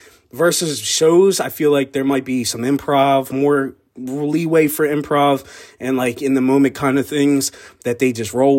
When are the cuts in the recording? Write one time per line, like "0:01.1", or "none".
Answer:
none